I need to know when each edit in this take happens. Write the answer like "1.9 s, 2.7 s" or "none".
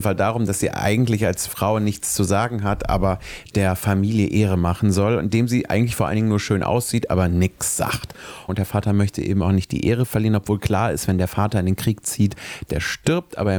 8.5 s, 12.7 s